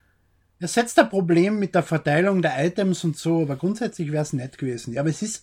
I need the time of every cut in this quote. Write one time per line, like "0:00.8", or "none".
none